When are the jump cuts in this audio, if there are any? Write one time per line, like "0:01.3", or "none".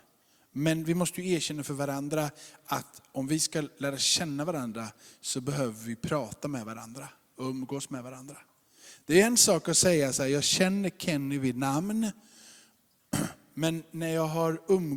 none